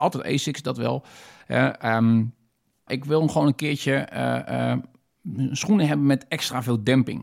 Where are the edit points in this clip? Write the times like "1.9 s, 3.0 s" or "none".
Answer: 2.9 s